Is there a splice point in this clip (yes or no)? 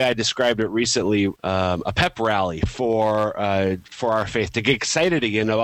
yes